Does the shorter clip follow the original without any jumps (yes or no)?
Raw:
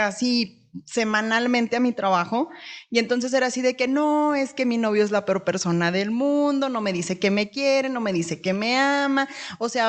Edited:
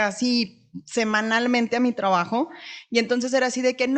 yes